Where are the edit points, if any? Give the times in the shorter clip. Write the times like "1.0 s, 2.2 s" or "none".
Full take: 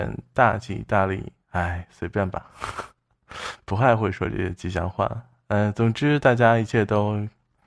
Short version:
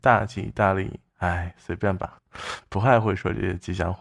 2.2 s